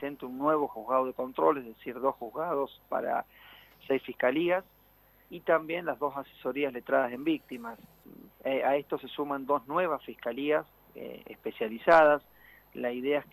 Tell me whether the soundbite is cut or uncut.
cut